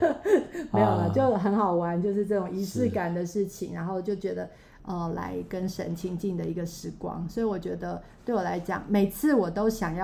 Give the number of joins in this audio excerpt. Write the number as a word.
one